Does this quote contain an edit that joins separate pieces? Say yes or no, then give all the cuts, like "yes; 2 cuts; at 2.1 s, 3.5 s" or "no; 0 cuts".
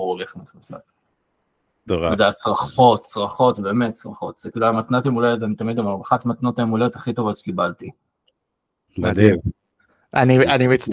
no; 0 cuts